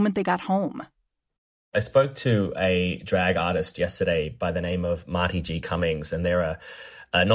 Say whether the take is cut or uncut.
uncut